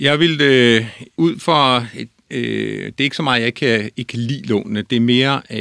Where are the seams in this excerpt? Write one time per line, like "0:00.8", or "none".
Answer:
0:01.2